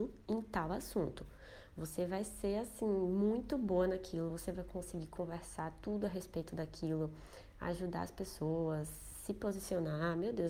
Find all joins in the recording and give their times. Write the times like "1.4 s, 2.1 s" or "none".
none